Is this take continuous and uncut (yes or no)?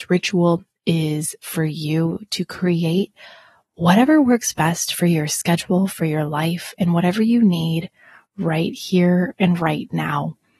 yes